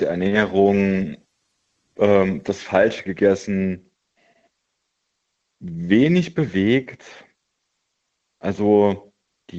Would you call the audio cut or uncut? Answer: uncut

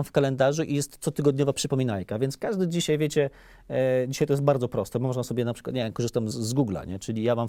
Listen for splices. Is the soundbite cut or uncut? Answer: cut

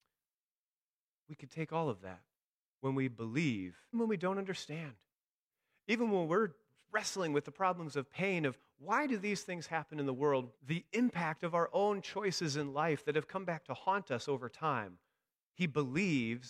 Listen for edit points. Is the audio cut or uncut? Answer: cut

